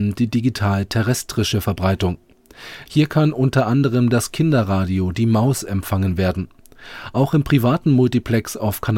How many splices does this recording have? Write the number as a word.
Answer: one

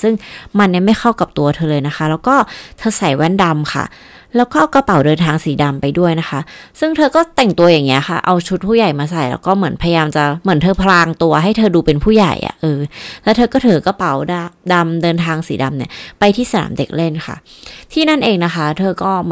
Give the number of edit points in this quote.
zero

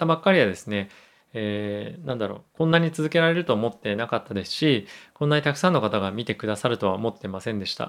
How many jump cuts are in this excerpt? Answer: zero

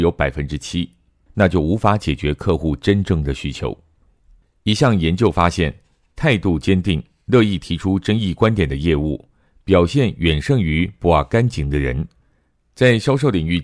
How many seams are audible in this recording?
one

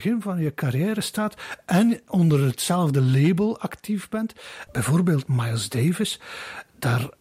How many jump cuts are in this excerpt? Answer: one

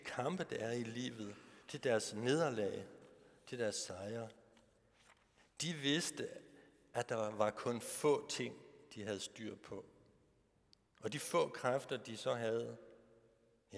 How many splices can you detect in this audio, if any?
zero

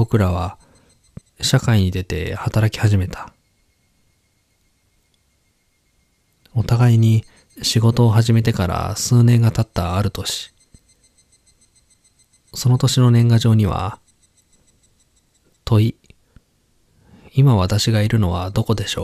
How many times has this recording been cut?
one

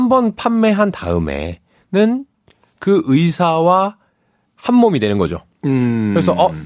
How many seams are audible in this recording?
zero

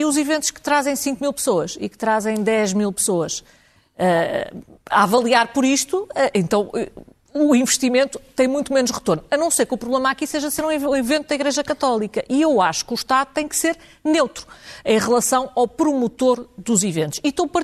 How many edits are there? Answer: zero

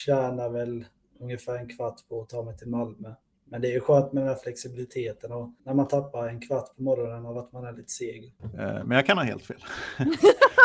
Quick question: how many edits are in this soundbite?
two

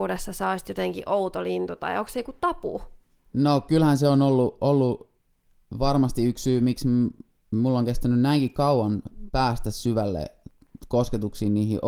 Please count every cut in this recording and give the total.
zero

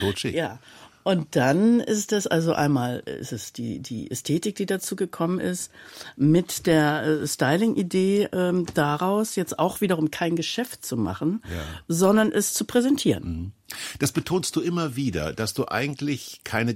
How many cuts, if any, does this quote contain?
zero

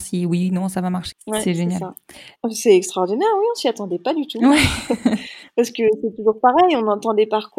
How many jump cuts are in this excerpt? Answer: two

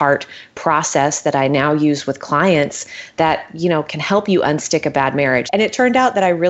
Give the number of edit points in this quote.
one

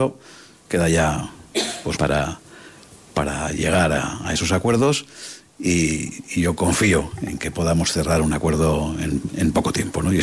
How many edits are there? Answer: two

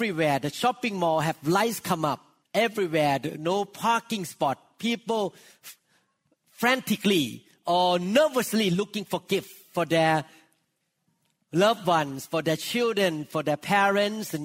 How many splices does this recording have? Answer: one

